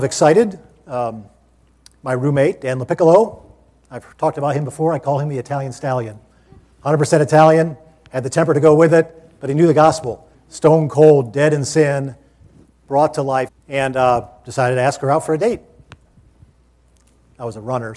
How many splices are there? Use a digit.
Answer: 2